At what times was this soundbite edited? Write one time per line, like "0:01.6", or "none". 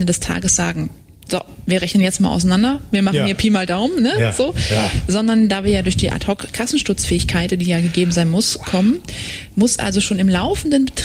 none